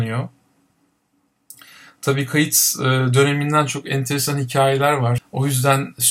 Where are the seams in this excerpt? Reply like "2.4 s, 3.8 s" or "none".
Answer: 5.2 s